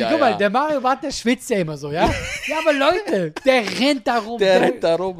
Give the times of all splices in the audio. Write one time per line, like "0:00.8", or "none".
none